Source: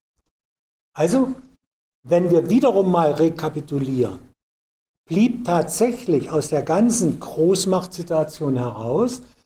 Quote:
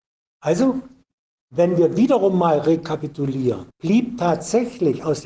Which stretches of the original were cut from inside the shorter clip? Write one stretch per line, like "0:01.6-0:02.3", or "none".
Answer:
0:04.2-0:05.0